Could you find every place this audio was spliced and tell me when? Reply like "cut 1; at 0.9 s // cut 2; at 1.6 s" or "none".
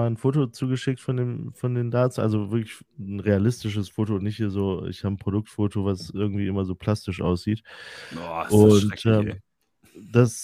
none